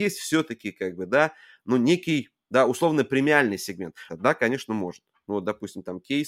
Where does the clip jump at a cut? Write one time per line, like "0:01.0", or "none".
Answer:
0:04.1